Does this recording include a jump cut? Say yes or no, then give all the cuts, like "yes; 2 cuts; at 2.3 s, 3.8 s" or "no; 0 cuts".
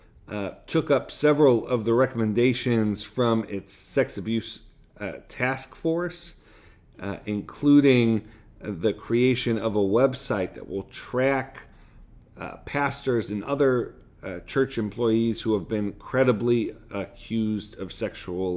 no; 0 cuts